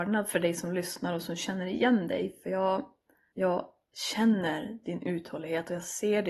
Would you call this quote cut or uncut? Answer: cut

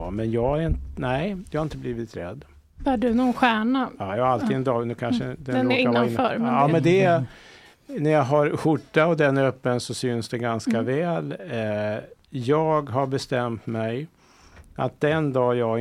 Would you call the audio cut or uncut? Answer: uncut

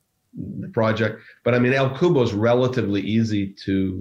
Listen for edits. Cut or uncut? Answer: uncut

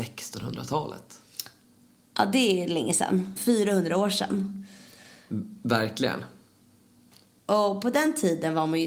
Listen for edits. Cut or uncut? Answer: cut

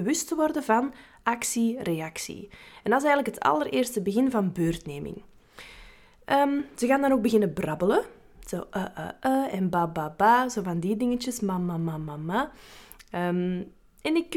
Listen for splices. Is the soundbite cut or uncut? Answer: uncut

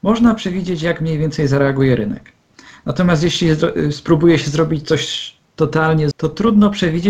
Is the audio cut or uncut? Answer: cut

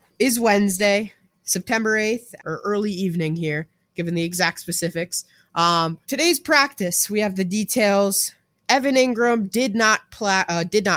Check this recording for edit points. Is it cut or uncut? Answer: cut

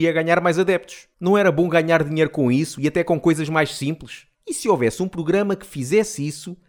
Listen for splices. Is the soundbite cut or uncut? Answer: cut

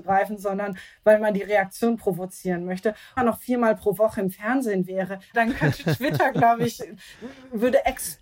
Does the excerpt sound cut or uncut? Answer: cut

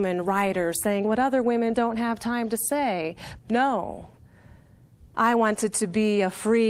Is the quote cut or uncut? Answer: cut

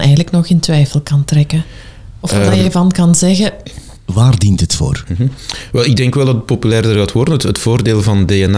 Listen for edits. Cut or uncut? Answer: cut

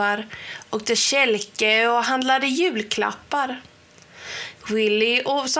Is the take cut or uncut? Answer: cut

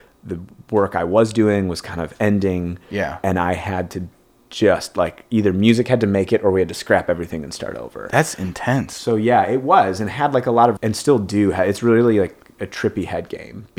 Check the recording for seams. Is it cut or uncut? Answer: cut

